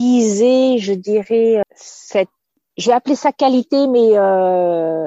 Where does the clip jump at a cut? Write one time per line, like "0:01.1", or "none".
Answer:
0:01.6